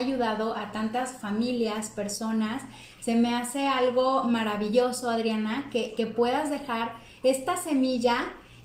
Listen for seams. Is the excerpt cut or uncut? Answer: uncut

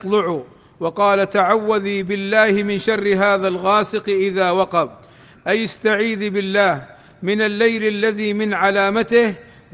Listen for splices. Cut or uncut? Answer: uncut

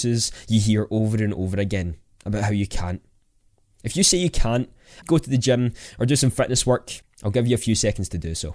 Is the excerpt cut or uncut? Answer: cut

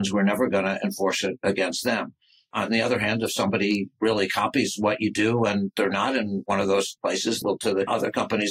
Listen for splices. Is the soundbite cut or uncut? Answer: cut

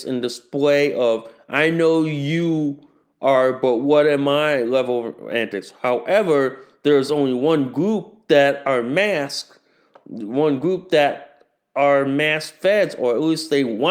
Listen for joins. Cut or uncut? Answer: uncut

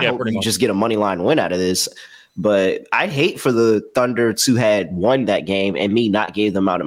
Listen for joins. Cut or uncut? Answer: uncut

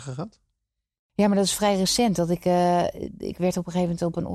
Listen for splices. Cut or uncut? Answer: uncut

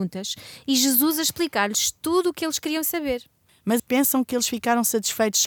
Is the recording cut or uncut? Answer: cut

